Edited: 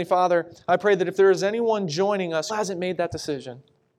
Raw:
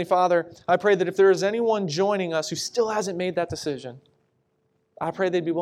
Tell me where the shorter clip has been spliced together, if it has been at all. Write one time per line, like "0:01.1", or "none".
0:02.5